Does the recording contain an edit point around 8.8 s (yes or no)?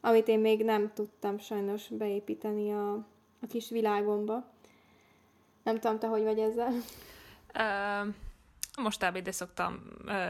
yes